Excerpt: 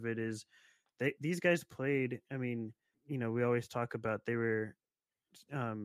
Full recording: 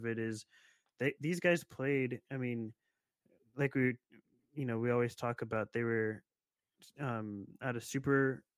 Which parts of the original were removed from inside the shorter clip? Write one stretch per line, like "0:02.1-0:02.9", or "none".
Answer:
0:02.9-0:04.4